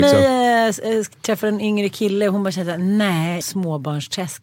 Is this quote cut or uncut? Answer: cut